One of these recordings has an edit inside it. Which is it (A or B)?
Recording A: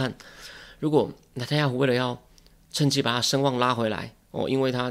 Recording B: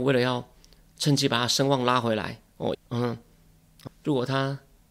B